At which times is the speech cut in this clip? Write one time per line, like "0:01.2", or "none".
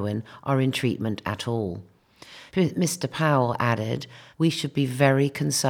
0:02.5
0:04.3